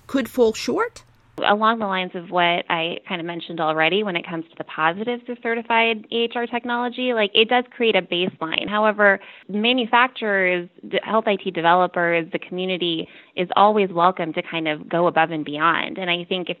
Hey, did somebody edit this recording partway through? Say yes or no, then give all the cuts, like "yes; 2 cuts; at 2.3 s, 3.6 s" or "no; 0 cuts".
no; 0 cuts